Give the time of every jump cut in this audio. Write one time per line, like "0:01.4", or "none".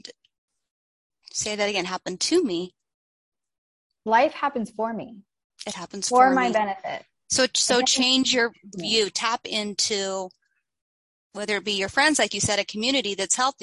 none